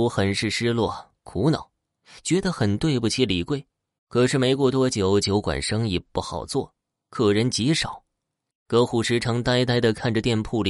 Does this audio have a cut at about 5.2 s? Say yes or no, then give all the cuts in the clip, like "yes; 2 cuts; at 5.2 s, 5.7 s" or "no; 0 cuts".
no; 2 cuts; at 4.0 s, 8.5 s